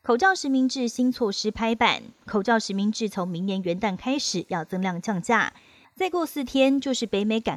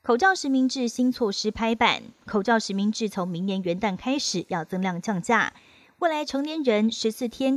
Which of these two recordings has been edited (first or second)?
first